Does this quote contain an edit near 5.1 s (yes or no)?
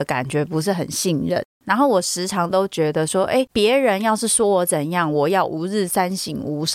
no